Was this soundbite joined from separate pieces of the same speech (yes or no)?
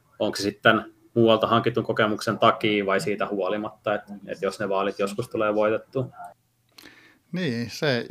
no